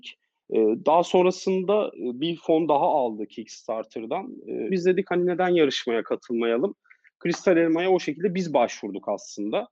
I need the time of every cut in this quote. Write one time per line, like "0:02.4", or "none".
0:04.7